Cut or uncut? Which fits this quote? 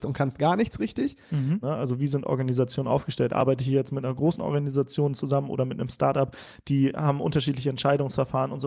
cut